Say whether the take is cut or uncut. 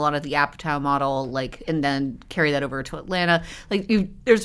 uncut